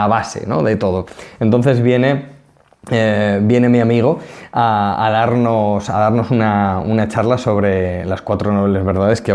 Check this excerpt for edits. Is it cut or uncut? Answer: uncut